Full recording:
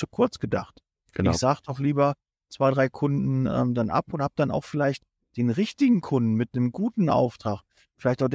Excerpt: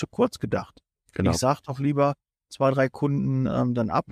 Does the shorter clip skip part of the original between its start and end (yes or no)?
no